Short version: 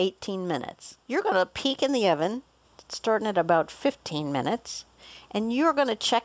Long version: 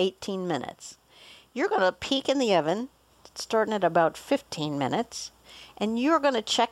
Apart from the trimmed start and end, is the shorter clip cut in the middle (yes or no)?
yes